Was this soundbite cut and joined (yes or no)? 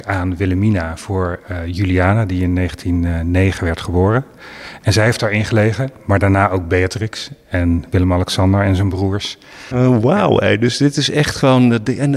no